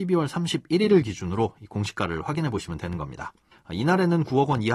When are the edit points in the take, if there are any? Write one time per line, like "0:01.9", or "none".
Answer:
0:03.5